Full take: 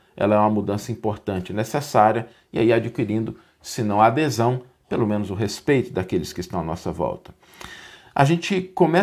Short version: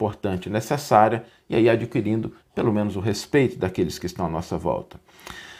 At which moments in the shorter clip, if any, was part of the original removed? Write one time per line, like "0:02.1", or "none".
0:02.4